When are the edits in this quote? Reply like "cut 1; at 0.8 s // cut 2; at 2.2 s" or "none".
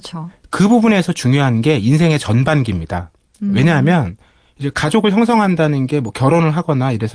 none